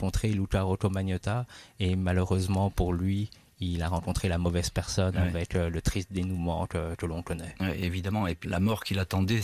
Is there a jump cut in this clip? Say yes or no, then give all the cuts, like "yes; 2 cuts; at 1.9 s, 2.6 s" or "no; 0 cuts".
yes; 1 cut; at 8.4 s